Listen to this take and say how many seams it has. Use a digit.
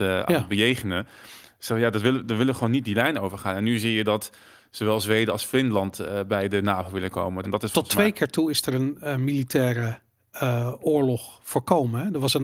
1